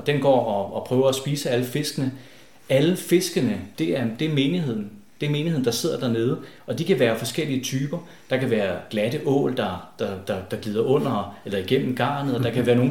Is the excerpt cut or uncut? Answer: cut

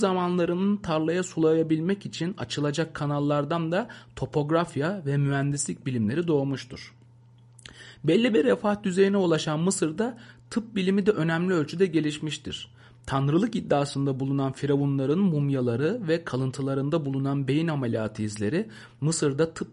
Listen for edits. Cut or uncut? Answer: uncut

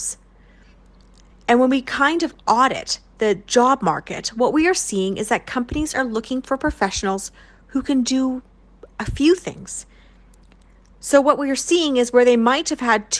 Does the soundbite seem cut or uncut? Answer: cut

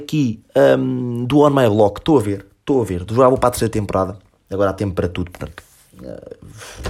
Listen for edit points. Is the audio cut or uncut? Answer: uncut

